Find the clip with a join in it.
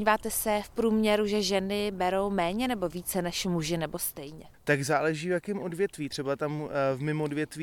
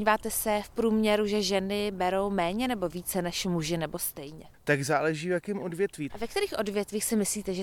second; 1 cut; at 6.1 s

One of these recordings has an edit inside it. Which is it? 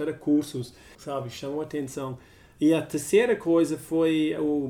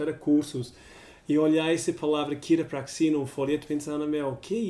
first; 1 cut; at 1.0 s

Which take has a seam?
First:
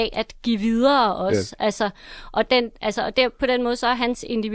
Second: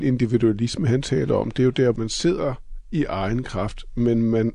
second; 1 cut; at 1.9 s

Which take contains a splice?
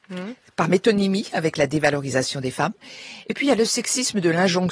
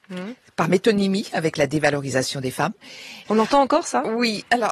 second; 1 cut; at 3.2 s

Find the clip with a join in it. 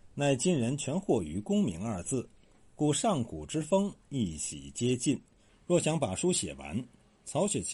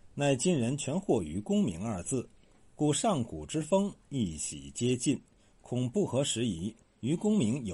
first; 1 cut; at 5.5 s

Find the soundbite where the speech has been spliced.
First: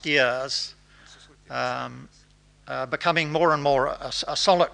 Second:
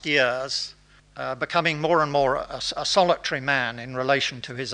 second; 1 cut; at 1.0 s

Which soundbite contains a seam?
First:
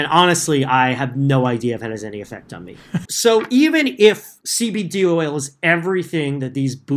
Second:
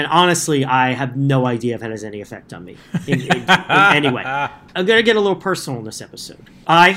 first; 1 cut; at 3.1 s

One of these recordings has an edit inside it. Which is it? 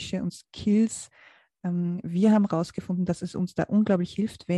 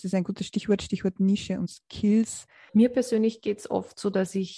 second; 1 cut; at 2.7 s

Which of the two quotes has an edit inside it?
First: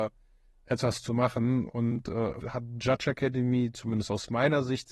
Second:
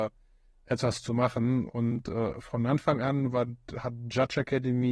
first; 1 cut; at 2.4 s

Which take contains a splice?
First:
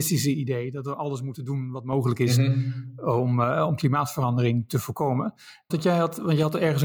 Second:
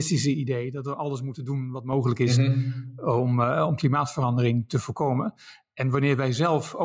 first; 1 cut; at 5.7 s

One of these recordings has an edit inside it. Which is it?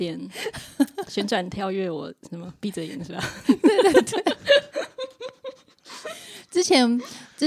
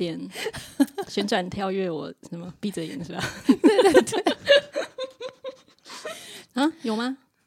second; 1 cut; at 6.5 s

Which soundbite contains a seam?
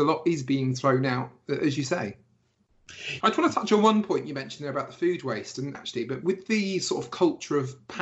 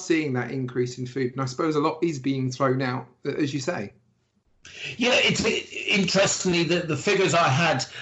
first; 2 cuts; at 3.2 s, 5.7 s

